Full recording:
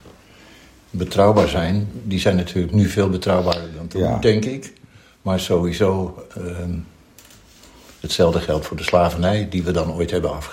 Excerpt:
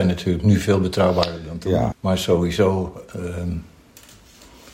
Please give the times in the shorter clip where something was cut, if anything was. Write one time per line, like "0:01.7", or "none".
0:01.9

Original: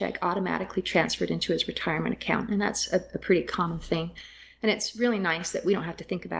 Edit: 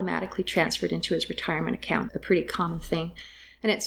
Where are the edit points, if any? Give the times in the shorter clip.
0:02.1

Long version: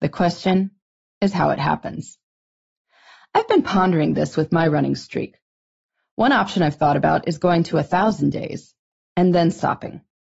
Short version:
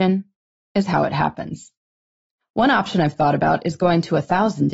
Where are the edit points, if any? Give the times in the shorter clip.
0:02.4

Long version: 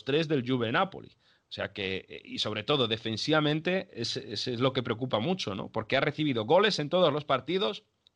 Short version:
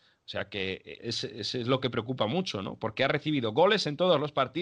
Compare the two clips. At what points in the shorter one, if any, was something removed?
0:01.0

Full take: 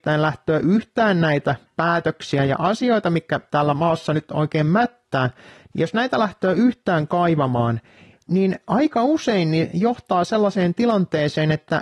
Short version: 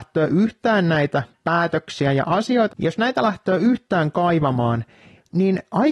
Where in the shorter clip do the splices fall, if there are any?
0:02.7

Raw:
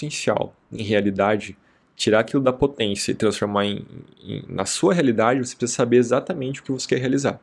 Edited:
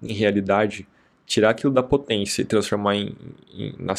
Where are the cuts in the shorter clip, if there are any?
none

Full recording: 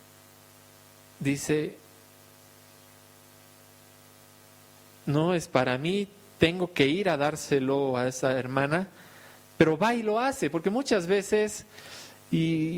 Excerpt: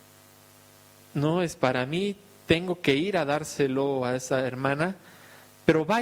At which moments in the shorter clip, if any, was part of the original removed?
0:01.0

